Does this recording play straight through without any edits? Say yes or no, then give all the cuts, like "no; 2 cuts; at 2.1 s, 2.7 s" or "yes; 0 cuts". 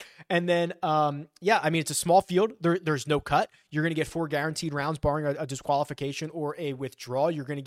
yes; 0 cuts